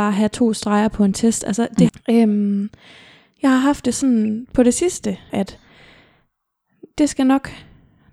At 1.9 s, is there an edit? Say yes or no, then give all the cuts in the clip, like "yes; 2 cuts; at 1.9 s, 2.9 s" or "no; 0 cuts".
yes; 2 cuts; at 1.9 s, 5.3 s